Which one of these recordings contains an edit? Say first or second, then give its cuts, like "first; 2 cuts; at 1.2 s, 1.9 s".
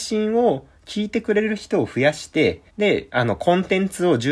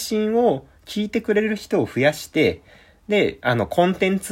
first; 1 cut; at 2.7 s